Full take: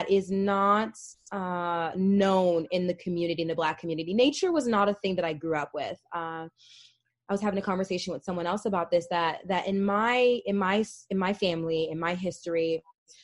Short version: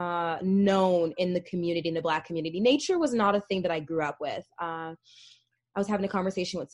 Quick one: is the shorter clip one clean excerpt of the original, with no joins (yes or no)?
yes